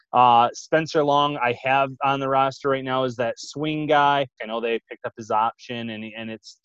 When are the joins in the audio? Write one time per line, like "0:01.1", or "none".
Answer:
0:04.4